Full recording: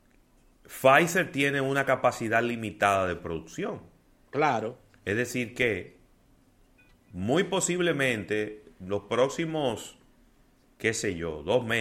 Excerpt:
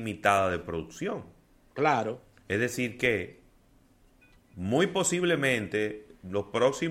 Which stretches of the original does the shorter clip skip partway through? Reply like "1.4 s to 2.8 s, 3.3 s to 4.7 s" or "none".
none